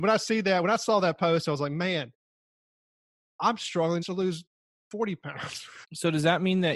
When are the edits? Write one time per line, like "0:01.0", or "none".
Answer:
0:04.0
0:05.8